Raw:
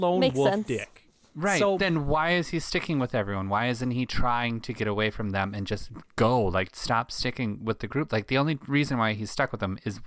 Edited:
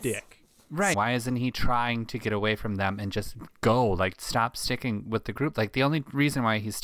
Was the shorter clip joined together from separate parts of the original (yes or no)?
yes